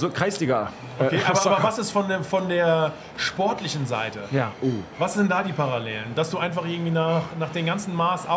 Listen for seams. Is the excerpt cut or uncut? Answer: uncut